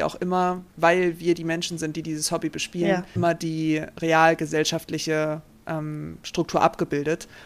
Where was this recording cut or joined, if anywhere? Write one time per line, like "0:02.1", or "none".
0:03.2